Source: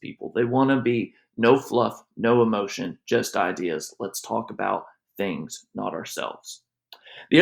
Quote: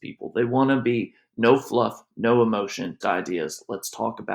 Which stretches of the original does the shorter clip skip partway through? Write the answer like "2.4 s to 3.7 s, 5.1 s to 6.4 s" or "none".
3.0 s to 3.3 s